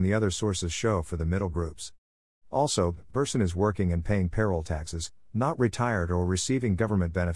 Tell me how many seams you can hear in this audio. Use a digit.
1